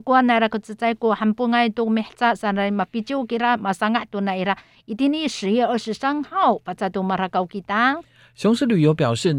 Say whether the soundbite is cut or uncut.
uncut